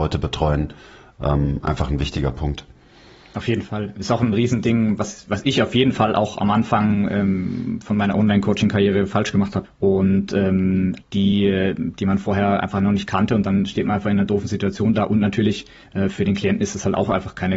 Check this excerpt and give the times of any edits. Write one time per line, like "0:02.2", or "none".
0:09.6
0:11.0